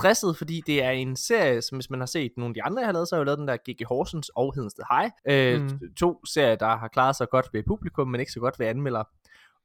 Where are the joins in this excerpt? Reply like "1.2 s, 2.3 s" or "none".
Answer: 5.2 s